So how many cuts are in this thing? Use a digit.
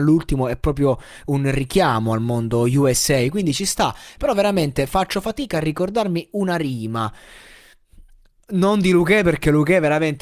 0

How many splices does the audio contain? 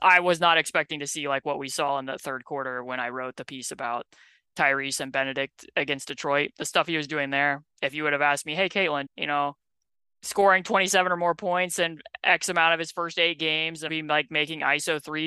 2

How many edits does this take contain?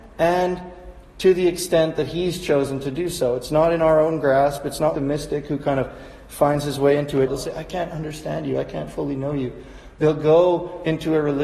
2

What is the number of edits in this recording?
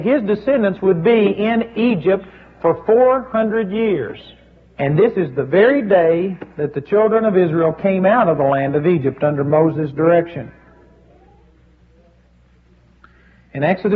1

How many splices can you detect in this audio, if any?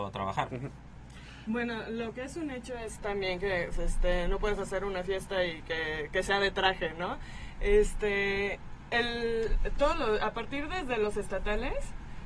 1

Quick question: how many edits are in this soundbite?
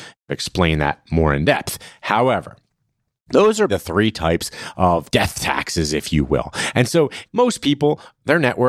2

